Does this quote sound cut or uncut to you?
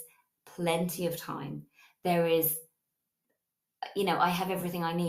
uncut